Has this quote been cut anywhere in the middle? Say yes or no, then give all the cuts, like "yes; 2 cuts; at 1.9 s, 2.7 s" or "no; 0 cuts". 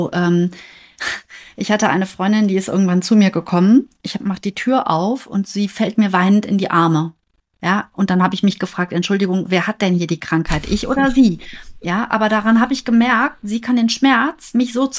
no; 0 cuts